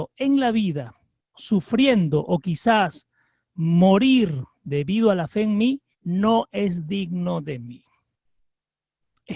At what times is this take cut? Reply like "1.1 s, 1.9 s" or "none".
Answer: 1.3 s, 5.9 s